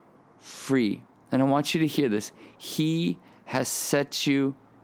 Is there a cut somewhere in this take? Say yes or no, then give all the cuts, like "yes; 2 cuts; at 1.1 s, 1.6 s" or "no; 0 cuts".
no; 0 cuts